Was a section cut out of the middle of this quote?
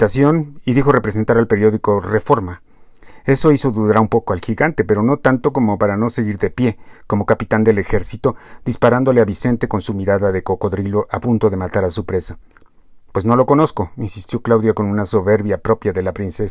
no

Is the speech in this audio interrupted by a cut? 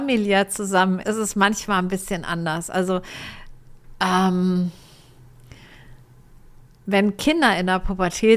yes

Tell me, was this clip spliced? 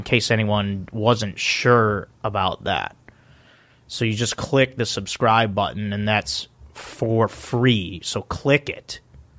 no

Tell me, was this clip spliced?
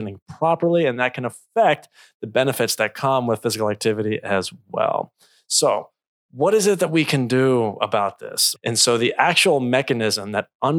yes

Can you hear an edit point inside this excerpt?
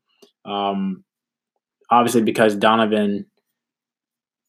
no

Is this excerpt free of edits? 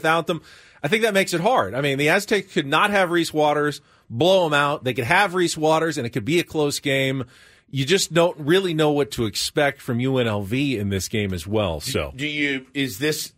yes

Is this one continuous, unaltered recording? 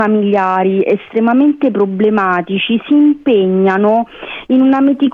yes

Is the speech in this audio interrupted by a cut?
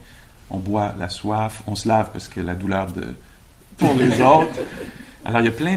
yes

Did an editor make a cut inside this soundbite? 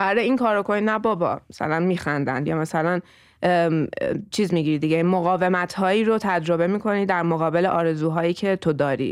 yes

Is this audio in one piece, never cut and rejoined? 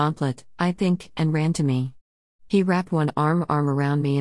yes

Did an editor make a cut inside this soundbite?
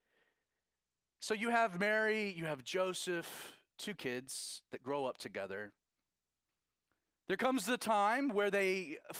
no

